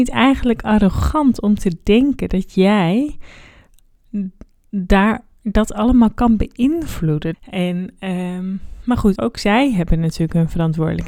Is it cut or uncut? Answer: cut